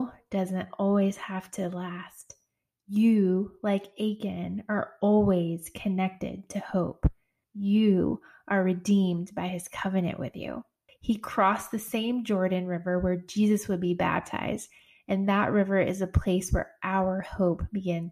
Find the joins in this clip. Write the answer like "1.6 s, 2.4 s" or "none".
7.4 s, 10.9 s